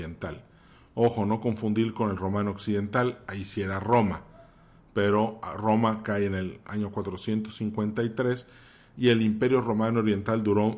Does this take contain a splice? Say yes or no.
no